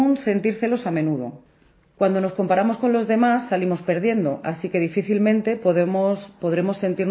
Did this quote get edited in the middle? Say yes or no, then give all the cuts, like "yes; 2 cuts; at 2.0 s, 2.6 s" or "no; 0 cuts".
no; 0 cuts